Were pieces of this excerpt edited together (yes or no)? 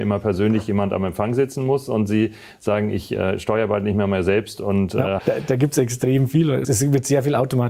yes